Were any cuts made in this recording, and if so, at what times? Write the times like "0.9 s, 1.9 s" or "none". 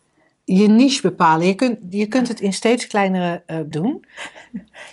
3.7 s